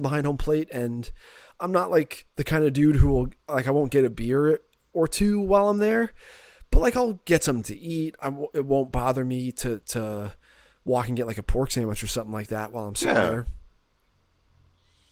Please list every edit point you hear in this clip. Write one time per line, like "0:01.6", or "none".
none